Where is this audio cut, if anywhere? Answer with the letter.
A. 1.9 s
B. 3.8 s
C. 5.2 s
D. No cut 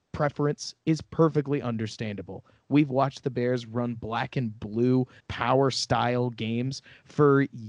C